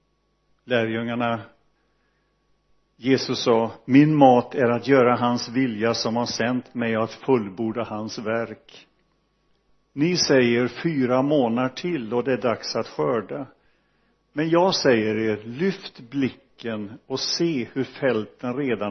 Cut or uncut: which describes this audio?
uncut